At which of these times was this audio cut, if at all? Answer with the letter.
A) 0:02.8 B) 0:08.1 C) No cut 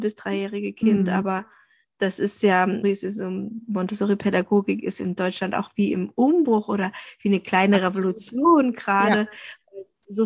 A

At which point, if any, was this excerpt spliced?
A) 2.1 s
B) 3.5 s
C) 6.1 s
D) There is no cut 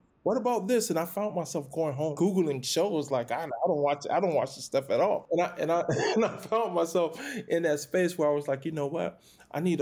A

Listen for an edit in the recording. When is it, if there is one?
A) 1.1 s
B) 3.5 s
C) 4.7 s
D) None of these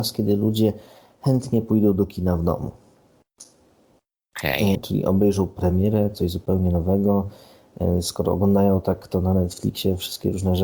C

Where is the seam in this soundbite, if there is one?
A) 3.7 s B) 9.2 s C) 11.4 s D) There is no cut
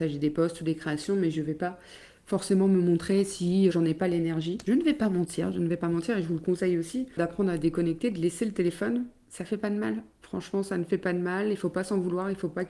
A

